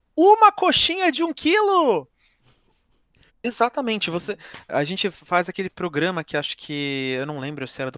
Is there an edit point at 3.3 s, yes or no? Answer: yes